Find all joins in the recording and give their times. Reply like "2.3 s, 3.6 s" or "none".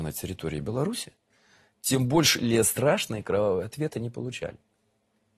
none